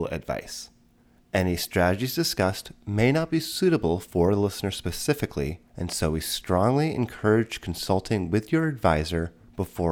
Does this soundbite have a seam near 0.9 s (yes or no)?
no